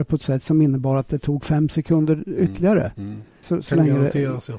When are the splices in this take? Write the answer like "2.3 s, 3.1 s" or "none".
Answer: 3.4 s